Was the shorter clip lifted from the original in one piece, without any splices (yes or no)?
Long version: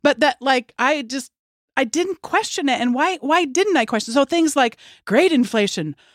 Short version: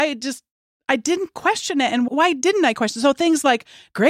no